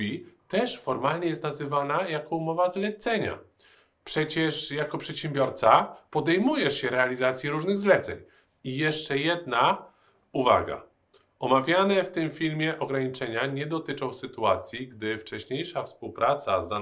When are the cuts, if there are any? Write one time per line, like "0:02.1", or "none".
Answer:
0:08.5

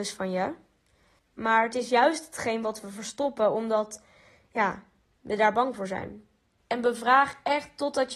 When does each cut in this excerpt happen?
0:01.2
0:06.6

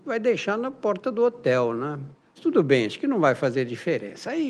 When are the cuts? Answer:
0:02.3

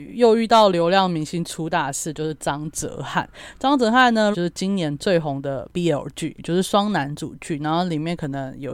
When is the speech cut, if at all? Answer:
0:04.3
0:06.4

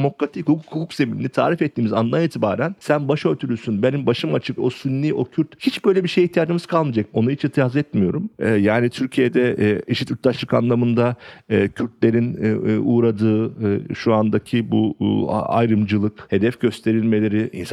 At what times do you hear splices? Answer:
0:04.6
0:07.1

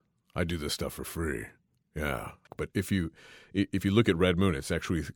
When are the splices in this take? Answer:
0:02.5

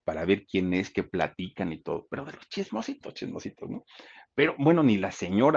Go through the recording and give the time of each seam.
none

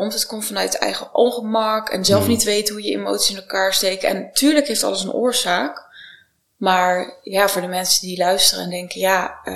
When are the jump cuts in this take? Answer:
none

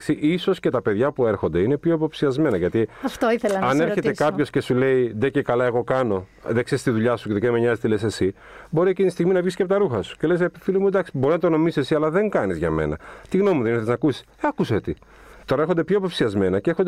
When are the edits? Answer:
0:15.4

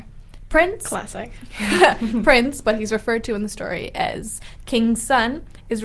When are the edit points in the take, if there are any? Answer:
none

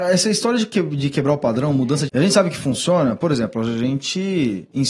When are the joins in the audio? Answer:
0:02.1

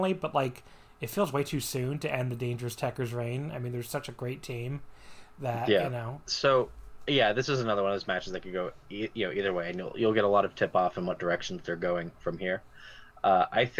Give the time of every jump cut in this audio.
0:06.3

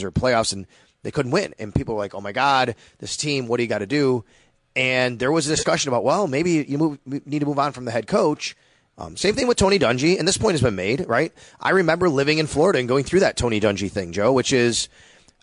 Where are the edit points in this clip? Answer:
0:08.9

